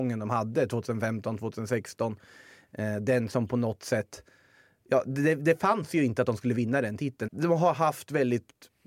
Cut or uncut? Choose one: cut